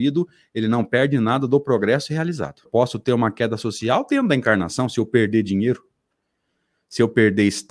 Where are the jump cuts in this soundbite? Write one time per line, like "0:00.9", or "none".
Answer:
0:02.7